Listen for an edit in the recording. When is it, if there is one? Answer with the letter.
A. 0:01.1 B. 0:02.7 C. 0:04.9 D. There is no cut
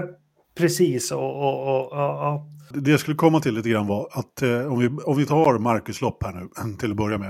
B